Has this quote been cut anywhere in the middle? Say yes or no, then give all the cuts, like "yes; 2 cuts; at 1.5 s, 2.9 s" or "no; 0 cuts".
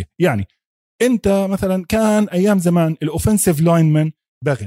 no; 0 cuts